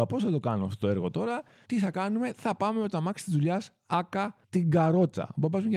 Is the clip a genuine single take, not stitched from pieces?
no; 2 cuts; at 1.6 s, 4.4 s

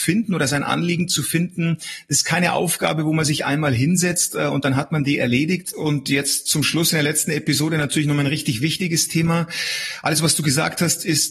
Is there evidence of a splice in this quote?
yes; 1 cut; at 5.7 s

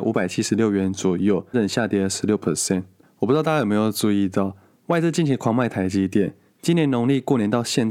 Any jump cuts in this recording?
yes; 1 cut; at 1.5 s

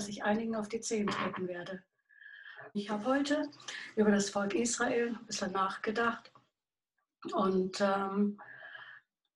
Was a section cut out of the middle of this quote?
yes; 1 cut; at 2.7 s

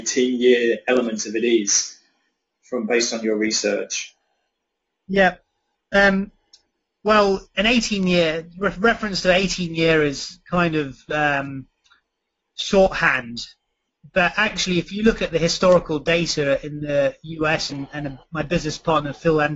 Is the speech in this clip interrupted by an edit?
yes; 1 cut; at 17.7 s

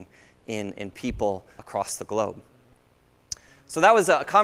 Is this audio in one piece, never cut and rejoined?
no; 1 cut; at 1.6 s

